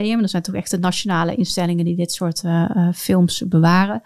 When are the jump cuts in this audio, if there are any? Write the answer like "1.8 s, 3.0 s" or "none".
none